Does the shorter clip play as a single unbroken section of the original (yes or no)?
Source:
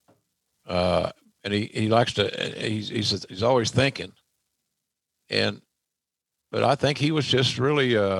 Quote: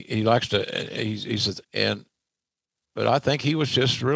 no